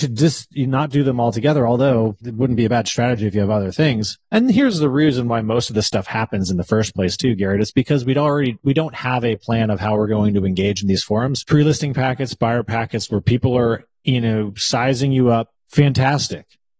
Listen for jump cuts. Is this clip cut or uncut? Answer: cut